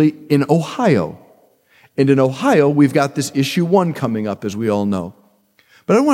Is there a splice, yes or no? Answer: no